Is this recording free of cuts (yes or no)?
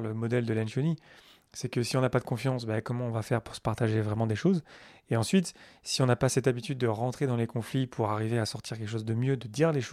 yes